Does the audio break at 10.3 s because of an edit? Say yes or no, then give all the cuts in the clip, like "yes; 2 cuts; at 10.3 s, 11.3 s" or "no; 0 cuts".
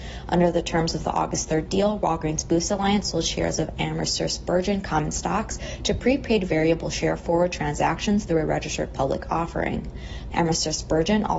yes; 1 cut; at 10.3 s